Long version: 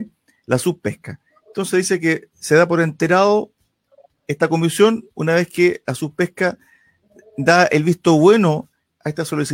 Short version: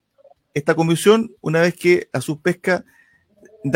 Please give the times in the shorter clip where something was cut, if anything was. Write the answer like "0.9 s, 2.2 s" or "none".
none